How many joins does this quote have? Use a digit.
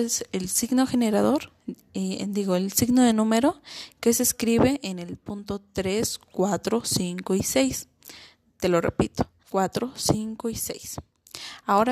1